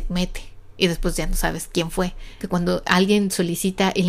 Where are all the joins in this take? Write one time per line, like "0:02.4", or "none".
0:02.4